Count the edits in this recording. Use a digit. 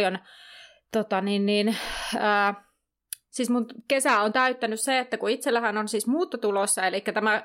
0